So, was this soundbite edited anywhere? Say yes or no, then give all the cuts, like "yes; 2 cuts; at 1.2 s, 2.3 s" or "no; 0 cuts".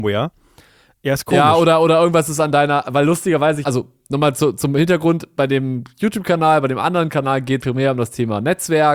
yes; 2 cuts; at 3.6 s, 7.6 s